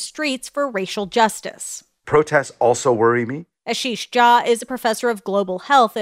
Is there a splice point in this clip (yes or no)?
no